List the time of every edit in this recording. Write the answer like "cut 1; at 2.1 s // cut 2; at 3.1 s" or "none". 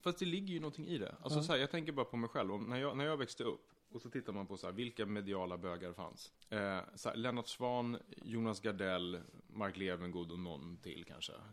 cut 1; at 6.3 s